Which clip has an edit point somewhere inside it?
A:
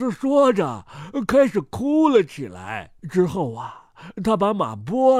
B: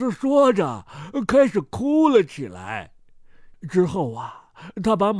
A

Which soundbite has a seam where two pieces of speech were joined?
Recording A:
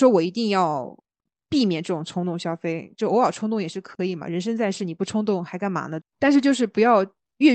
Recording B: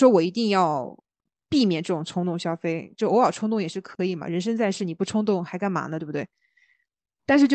A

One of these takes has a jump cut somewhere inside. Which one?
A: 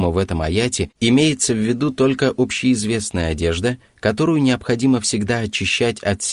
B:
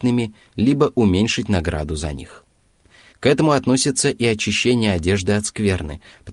B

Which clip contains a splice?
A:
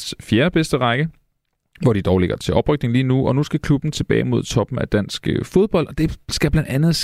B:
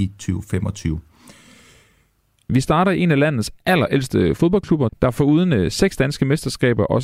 B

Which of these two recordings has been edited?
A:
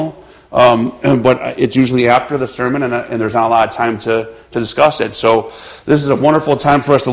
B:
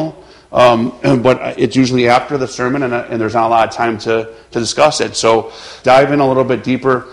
B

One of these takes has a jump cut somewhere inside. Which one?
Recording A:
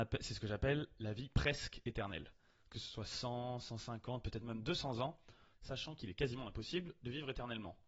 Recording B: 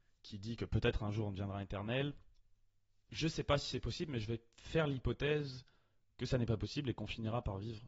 A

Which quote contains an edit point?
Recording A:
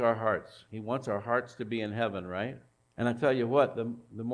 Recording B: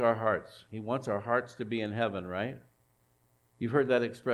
A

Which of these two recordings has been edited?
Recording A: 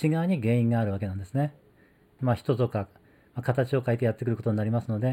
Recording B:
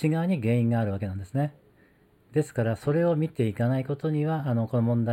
A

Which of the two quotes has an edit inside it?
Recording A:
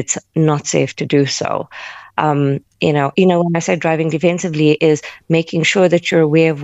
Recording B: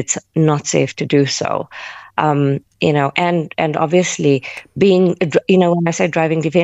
A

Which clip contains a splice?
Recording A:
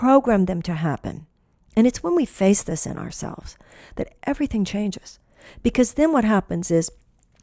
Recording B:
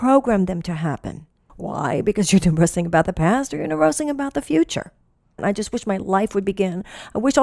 B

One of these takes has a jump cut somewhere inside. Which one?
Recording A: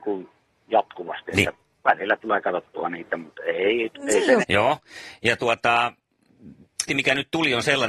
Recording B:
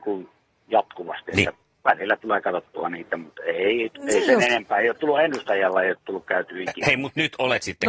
A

